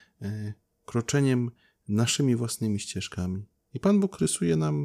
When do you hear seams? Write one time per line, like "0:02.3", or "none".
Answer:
0:03.7